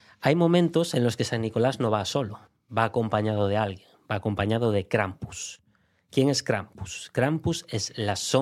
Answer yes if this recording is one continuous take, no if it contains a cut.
yes